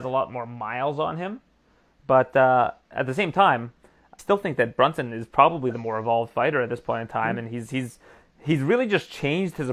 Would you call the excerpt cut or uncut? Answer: cut